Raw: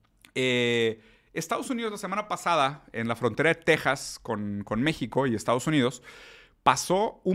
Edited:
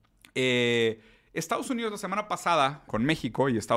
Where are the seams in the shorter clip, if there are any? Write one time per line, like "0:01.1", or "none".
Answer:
0:02.9